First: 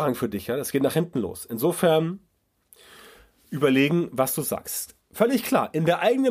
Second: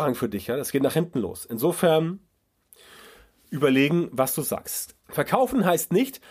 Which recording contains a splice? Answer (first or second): second